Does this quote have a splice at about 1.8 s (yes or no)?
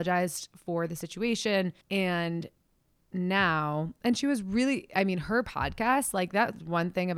yes